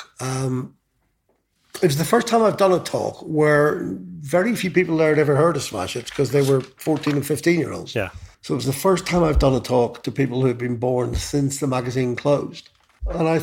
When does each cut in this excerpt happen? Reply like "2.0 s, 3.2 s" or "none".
8.3 s